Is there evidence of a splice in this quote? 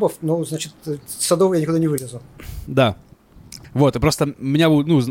yes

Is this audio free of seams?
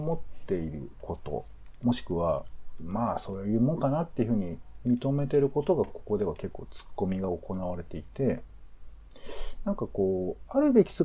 yes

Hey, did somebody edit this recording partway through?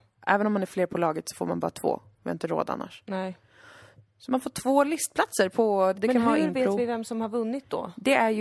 yes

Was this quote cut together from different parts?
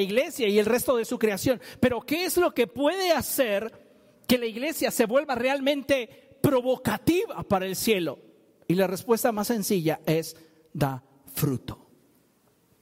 no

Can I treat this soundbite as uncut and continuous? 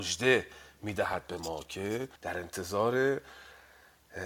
no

